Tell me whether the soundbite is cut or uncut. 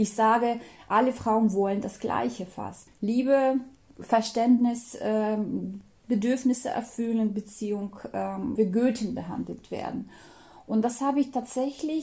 cut